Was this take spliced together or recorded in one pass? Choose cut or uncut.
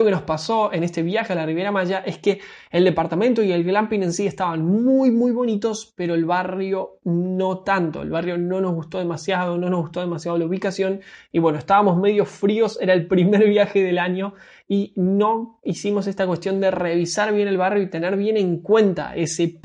uncut